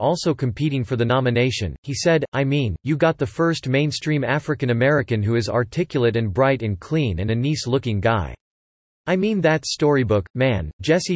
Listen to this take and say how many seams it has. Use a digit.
0